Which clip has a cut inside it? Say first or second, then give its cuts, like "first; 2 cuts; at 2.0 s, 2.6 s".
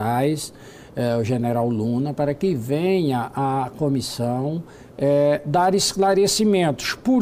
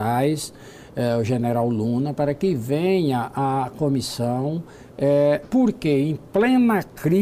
second; 1 cut; at 5.4 s